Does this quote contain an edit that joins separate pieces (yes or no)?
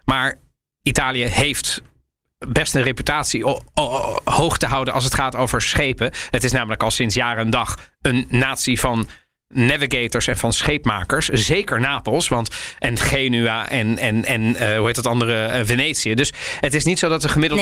no